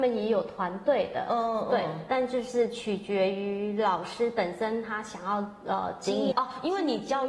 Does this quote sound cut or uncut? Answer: cut